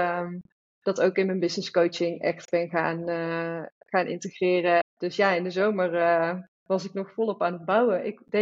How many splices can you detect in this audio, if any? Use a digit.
2